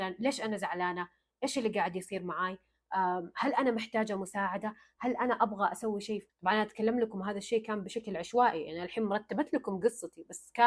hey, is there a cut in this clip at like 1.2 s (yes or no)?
no